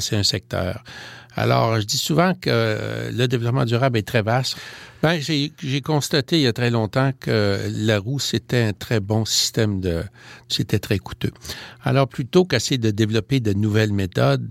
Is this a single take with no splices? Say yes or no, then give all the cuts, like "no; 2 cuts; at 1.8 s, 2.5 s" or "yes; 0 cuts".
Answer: no; 2 cuts; at 4.5 s, 10.5 s